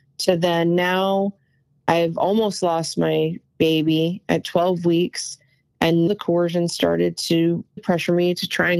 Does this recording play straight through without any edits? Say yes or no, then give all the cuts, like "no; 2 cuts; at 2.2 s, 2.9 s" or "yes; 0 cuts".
no; 2 cuts; at 6.1 s, 7.8 s